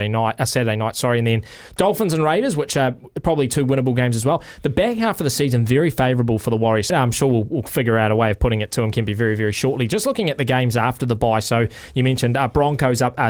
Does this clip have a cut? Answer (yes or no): yes